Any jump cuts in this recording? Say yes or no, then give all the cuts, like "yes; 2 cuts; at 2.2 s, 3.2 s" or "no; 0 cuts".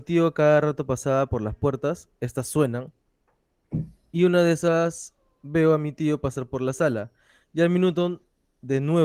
no; 0 cuts